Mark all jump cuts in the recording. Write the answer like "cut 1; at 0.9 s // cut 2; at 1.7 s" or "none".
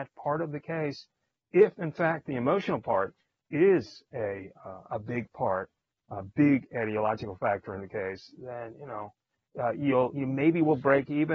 none

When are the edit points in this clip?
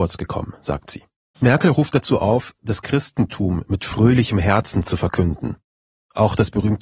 cut 1; at 1.3 s

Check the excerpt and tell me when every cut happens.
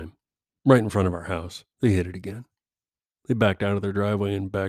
cut 1; at 1.7 s

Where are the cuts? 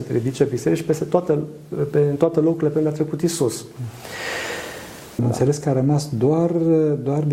cut 1; at 5.2 s

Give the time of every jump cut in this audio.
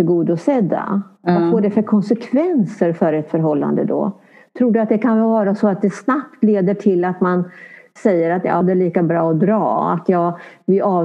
cut 1; at 8.6 s

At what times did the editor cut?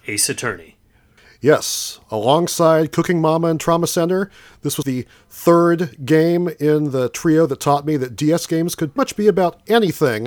cut 1; at 4.8 s // cut 2; at 9.0 s

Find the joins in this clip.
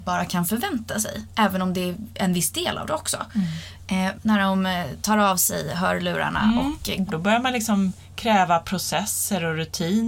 cut 1; at 4.1 s // cut 2; at 7.1 s

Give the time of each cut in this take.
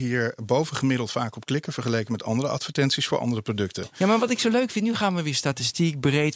none

